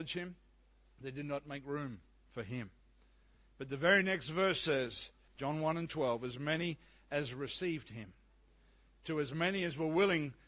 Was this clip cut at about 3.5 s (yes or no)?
no